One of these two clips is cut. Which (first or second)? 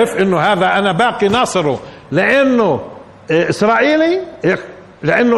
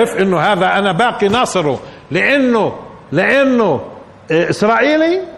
first